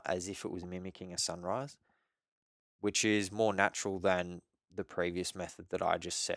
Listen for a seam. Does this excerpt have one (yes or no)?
no